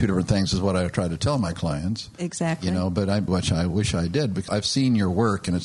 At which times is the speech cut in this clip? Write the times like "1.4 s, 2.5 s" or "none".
3.3 s, 4.5 s